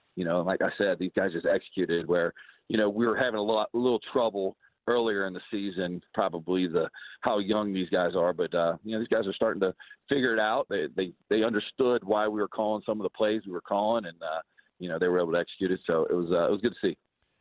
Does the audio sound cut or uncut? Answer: cut